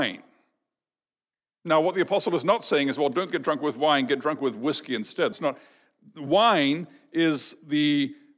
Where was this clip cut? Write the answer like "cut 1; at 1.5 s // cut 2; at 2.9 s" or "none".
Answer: cut 1; at 5.3 s